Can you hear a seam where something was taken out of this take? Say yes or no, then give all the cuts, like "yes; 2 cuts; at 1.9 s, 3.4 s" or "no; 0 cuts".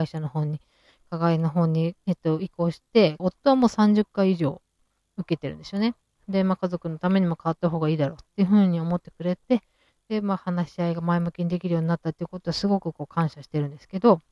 yes; 2 cuts; at 3.2 s, 6.2 s